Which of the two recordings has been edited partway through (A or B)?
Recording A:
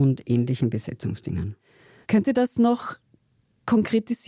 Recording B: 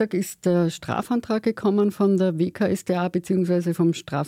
A